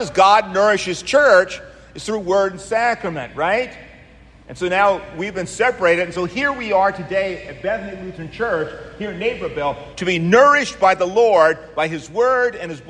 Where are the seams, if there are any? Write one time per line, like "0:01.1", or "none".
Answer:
0:09.9